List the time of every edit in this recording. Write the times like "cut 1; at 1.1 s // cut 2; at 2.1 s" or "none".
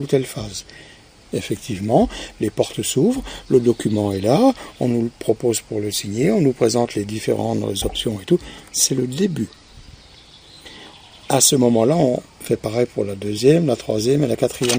cut 1; at 1.2 s